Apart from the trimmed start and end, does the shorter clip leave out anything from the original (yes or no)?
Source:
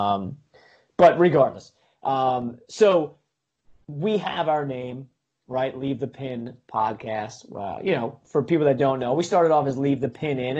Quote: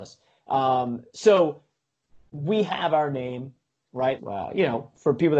yes